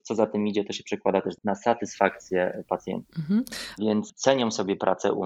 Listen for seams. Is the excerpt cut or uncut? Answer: cut